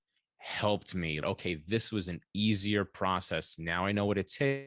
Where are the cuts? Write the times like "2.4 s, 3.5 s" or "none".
1.2 s